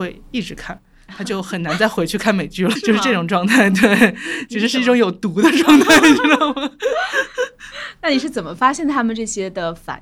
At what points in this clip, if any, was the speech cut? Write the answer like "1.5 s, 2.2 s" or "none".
2.8 s